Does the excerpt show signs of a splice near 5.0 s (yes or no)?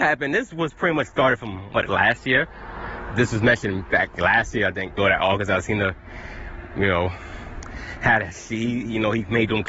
yes